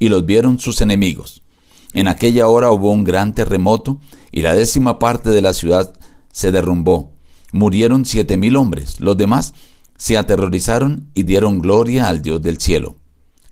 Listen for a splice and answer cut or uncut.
uncut